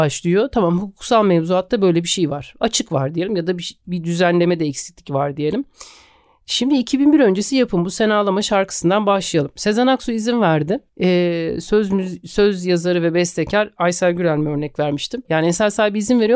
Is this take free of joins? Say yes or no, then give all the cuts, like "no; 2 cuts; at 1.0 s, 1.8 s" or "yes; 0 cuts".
no; 2 cuts; at 10.9 s, 15.3 s